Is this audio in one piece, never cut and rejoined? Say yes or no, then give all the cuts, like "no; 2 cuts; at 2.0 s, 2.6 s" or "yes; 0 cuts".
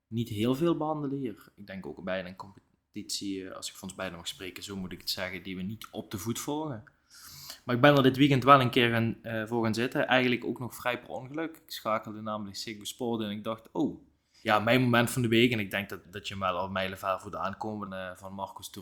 no; 3 cuts; at 14.4 s, 16.0 s, 17.9 s